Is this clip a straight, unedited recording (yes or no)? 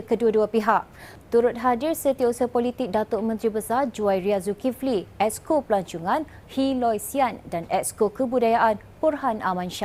yes